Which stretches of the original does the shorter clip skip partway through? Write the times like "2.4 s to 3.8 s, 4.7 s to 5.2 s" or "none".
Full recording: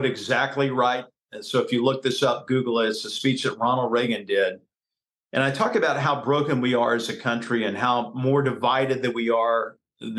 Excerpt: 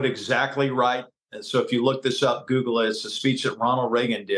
none